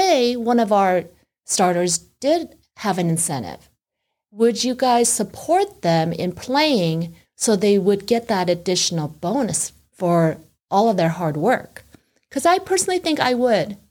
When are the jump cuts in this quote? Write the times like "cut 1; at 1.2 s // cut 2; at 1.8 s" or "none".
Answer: none